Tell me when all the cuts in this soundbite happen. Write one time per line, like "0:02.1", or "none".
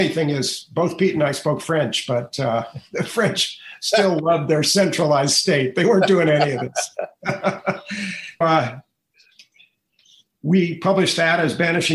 0:08.4